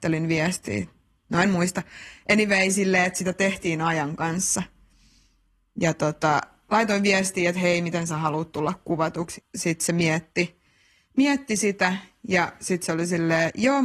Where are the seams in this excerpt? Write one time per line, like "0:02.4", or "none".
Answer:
0:09.4